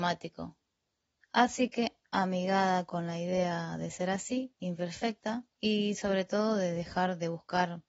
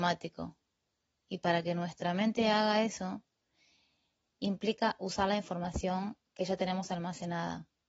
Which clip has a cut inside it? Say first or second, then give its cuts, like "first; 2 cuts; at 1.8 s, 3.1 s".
first; 2 cuts; at 1.2 s, 5.5 s